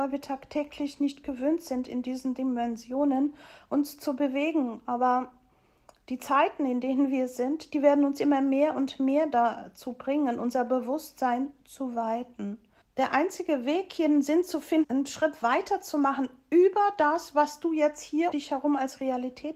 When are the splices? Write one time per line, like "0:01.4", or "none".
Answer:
0:12.8
0:14.8
0:18.3

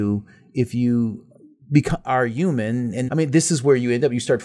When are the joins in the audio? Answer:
0:03.1

